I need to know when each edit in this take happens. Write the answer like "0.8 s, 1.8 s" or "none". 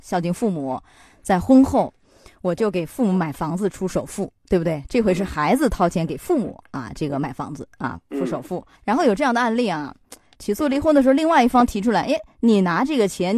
8.8 s, 10.3 s